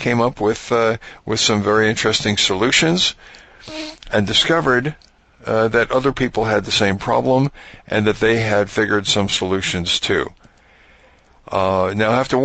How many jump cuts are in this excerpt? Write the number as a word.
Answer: zero